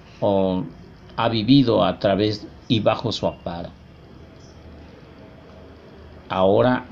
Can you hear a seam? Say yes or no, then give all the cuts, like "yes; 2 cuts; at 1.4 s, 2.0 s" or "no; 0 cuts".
no; 0 cuts